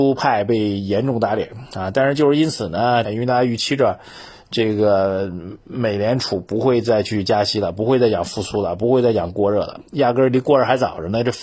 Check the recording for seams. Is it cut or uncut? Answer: cut